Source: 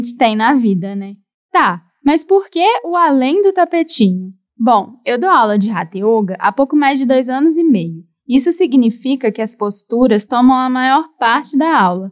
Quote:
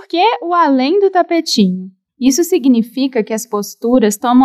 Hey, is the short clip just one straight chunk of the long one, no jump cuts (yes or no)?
no